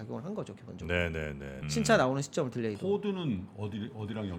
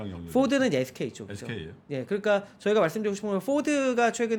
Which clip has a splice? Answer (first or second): first